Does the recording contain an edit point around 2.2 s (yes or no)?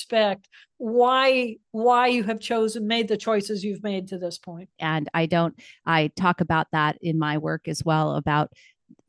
no